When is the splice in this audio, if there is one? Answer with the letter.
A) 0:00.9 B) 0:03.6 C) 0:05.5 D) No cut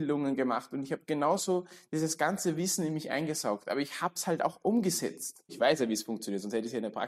C